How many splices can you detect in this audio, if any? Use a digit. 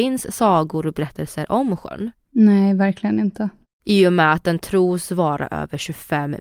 1